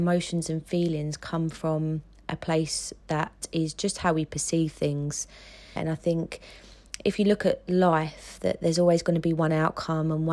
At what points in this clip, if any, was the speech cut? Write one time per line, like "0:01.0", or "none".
0:05.8